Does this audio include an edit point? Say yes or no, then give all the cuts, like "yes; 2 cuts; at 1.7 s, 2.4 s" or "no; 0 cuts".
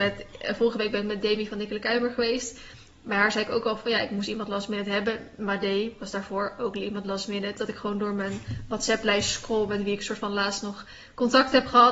no; 0 cuts